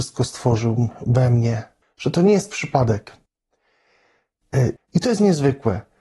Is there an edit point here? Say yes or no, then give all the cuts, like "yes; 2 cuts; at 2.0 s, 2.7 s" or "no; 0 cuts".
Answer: yes; 2 cuts; at 1.8 s, 4.8 s